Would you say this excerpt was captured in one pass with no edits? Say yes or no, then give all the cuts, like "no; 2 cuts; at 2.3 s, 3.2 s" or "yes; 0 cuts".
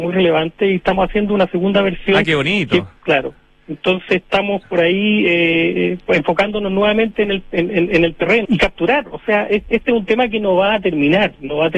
no; 2 cuts; at 3.0 s, 8.4 s